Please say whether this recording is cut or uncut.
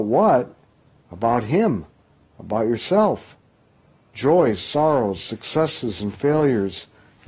uncut